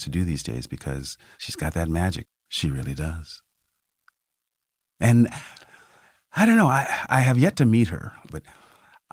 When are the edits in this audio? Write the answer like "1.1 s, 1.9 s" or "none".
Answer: 2.2 s, 7.1 s